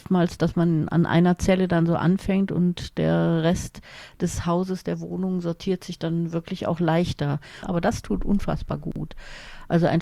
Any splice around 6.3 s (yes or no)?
no